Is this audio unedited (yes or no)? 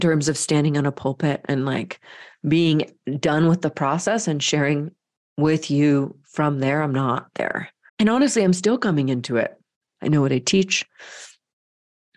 no